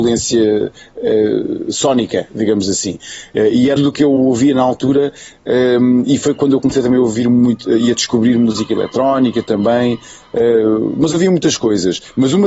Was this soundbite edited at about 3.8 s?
yes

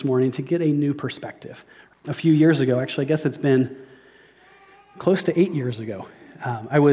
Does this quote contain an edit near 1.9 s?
yes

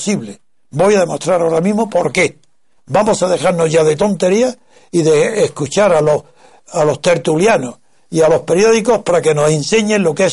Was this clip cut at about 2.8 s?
yes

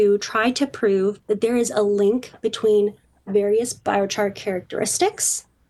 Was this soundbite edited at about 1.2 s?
yes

